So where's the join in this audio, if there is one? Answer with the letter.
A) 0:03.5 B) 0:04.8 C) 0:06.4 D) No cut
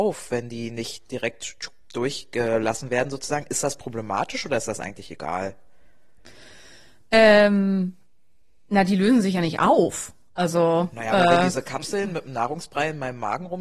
D